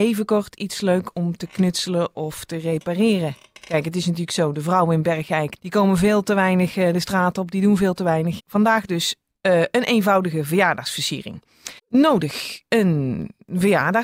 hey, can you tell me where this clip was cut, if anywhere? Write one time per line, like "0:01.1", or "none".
0:05.6
0:08.4
0:11.8